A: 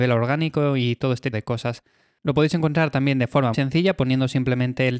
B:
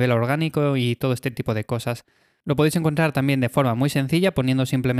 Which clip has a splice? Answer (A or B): A